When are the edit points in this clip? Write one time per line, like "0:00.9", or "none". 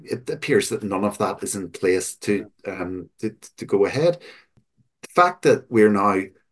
none